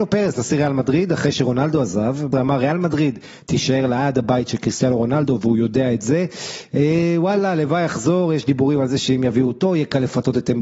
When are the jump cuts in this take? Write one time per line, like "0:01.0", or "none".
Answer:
0:02.3